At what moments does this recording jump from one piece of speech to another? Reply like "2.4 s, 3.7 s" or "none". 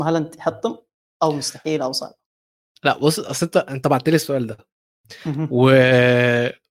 none